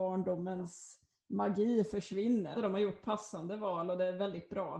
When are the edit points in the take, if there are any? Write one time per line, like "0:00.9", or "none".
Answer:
0:02.5